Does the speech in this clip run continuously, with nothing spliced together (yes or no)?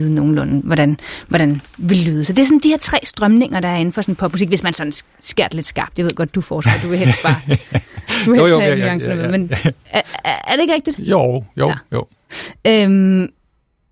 yes